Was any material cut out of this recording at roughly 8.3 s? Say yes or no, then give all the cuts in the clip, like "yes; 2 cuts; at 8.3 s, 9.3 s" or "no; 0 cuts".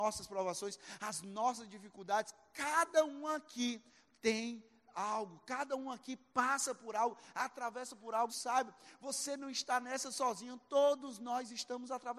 yes; 1 cut; at 8.3 s